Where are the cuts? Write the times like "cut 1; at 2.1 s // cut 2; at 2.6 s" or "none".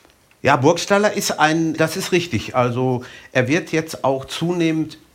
cut 1; at 1.8 s